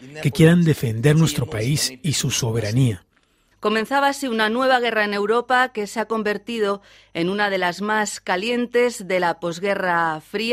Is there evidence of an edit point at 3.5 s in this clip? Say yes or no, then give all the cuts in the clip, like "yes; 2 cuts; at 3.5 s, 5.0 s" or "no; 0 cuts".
yes; 1 cut; at 3.5 s